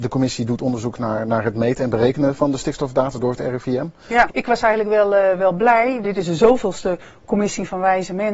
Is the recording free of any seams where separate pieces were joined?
no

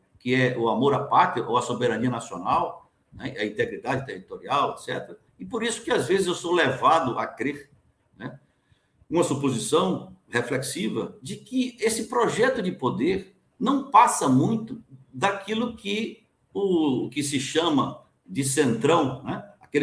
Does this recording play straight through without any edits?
no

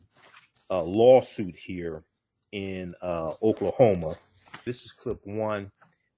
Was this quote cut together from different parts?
yes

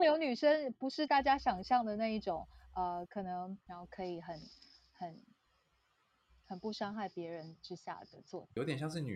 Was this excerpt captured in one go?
no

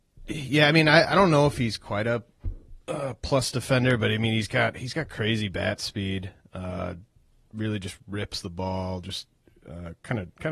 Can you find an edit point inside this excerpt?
no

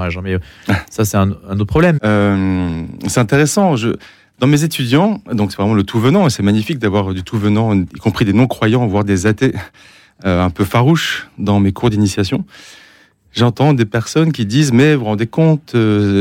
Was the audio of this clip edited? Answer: yes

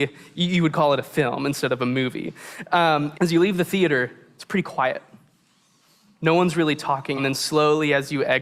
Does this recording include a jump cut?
yes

